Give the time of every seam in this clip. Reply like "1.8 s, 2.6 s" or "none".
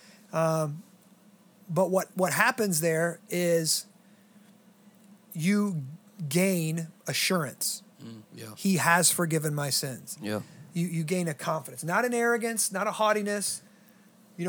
8.2 s